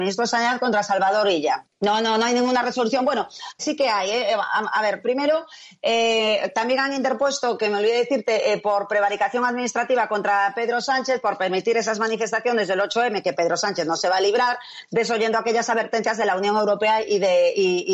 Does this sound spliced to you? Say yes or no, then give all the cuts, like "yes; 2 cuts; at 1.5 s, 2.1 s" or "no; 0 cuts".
yes; 3 cuts; at 1.6 s, 3.6 s, 5.0 s